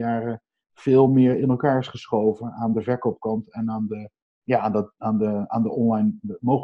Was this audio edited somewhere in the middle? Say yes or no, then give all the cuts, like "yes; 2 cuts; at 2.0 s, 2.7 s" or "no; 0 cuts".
no; 0 cuts